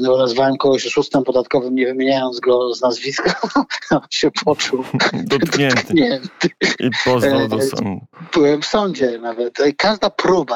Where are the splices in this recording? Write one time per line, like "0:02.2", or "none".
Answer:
none

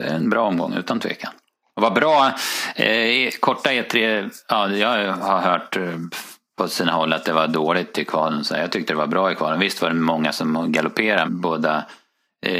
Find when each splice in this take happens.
0:11.2

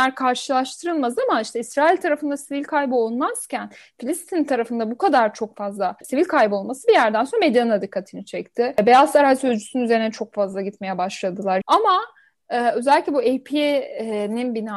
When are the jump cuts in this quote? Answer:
0:11.6

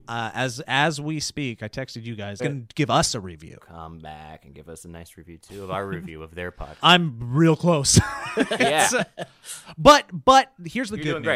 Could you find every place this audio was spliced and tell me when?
0:02.4
0:06.8

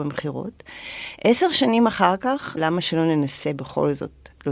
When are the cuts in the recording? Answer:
0:02.6

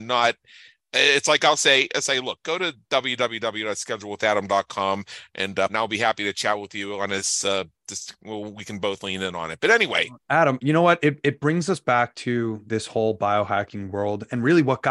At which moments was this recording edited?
0:05.7

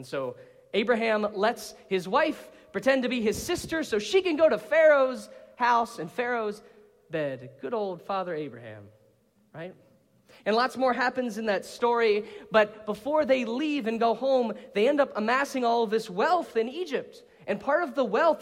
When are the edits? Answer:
none

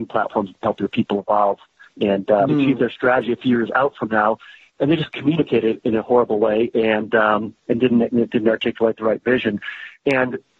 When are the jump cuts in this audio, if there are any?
0:02.5

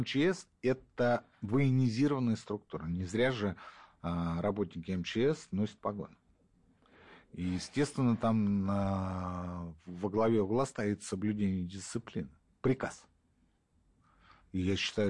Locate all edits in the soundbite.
none

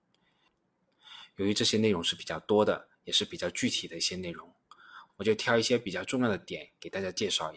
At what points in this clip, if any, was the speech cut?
0:05.1

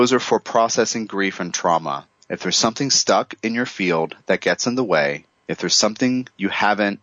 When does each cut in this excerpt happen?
none

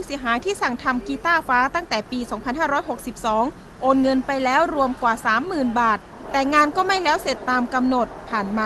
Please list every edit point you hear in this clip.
0:01.4

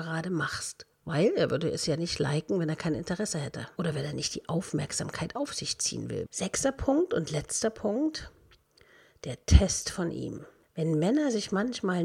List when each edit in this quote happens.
0:06.3

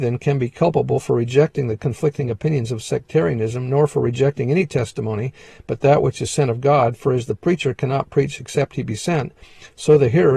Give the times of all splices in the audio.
none

